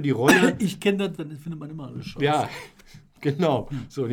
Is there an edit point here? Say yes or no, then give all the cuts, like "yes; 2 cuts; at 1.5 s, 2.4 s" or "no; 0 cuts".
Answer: yes; 1 cut; at 1.2 s